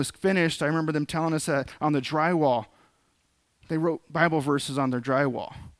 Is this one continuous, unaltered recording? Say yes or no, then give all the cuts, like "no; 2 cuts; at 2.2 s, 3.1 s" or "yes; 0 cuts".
yes; 0 cuts